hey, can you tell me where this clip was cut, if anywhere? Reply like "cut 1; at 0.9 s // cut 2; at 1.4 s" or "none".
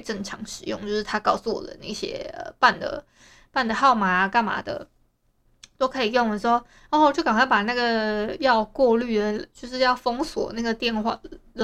none